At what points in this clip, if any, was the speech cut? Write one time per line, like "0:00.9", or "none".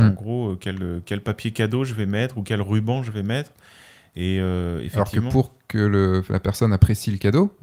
none